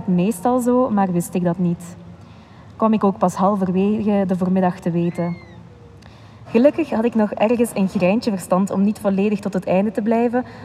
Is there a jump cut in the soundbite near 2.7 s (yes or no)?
no